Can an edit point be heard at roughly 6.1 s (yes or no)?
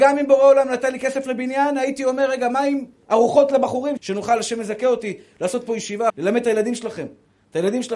yes